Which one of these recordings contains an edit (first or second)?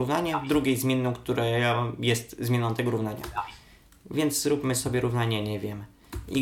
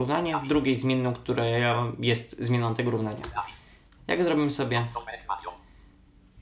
second